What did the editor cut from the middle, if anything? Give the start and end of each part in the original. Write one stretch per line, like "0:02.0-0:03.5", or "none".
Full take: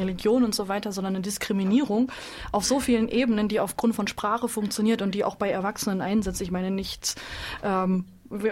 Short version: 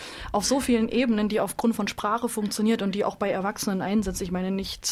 none